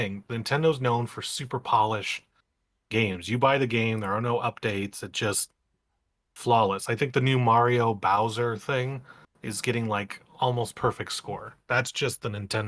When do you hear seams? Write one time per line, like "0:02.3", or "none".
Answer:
none